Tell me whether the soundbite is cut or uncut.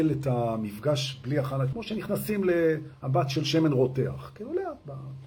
cut